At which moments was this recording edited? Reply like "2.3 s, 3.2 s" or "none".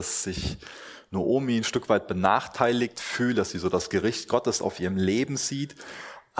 none

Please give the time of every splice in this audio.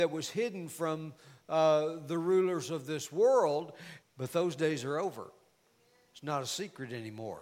4.0 s

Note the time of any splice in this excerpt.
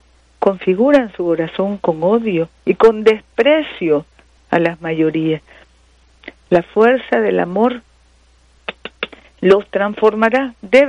none

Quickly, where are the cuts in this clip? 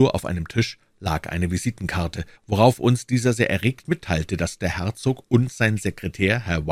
2.3 s

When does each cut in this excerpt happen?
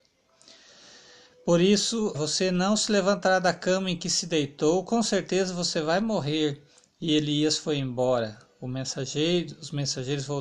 2.1 s

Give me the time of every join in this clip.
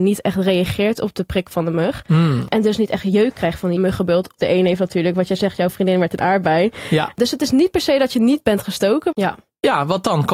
4.4 s, 7.1 s, 9.1 s

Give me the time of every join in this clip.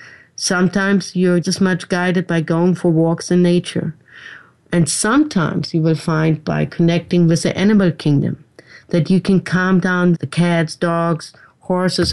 1.4 s, 10.1 s

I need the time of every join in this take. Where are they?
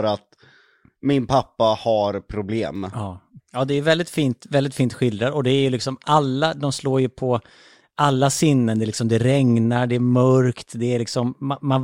3.4 s

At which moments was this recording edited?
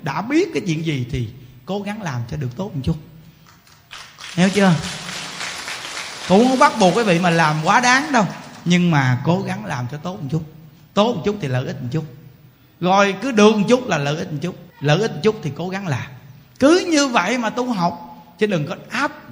14.7 s

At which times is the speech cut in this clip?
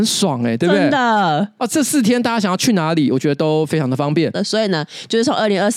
4.3 s

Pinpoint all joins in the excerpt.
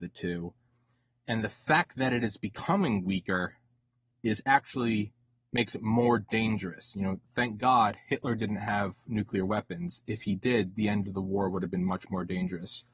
none

